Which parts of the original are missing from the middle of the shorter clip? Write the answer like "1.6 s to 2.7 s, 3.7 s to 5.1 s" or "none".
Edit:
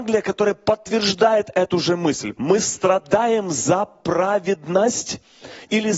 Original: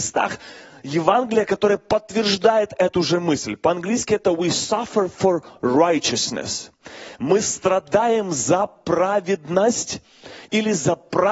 3.6 s to 7.2 s